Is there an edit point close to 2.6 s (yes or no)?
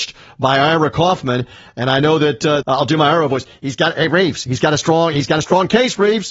yes